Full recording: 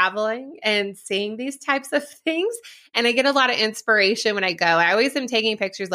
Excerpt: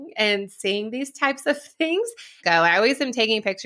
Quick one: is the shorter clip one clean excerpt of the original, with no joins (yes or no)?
no